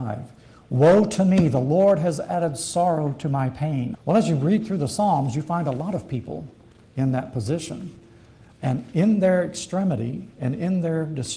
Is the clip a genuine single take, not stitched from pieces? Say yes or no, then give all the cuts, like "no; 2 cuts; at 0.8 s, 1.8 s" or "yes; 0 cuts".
no; 2 cuts; at 4.0 s, 8.5 s